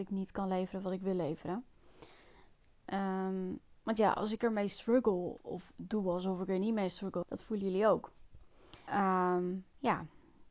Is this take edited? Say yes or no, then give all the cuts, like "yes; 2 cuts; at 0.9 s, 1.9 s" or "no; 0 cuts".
yes; 3 cuts; at 5.4 s, 7.2 s, 8.9 s